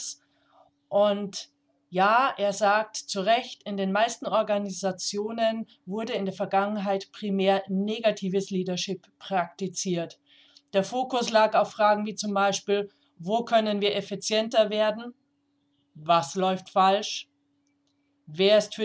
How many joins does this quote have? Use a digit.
0